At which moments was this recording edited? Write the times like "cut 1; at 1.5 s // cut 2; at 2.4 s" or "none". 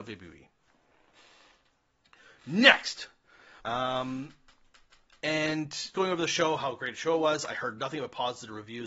cut 1; at 3.6 s // cut 2; at 5.9 s